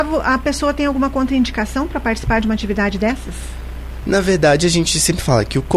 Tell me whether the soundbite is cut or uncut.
uncut